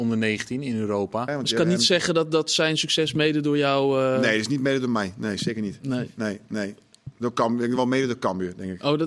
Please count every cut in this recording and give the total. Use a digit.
1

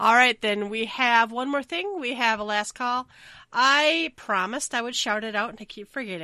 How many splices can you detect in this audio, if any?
0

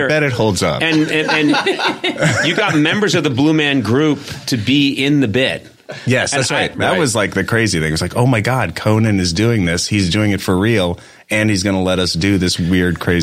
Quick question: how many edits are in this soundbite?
1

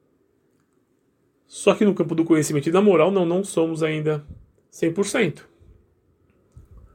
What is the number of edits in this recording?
0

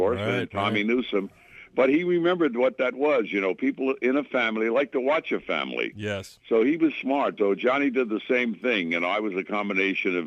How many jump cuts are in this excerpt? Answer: 1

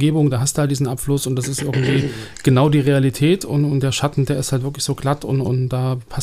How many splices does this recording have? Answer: 0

